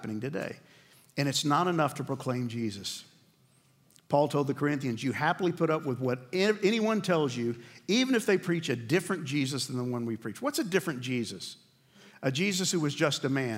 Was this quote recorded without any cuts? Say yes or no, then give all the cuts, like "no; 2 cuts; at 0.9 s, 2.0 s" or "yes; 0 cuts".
yes; 0 cuts